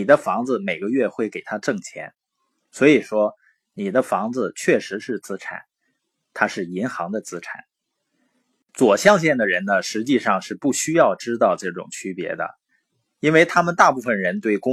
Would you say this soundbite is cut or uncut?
uncut